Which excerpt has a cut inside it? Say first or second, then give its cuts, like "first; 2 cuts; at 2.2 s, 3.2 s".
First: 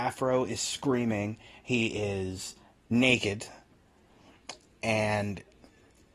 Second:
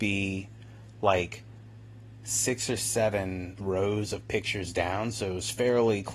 second; 1 cut; at 3.6 s